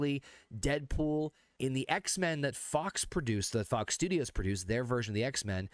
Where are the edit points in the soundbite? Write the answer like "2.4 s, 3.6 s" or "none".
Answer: 1.6 s